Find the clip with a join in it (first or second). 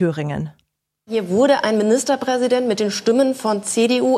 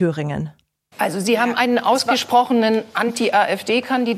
second